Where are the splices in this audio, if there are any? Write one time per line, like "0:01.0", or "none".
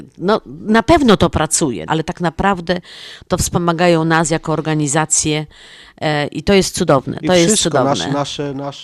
0:01.9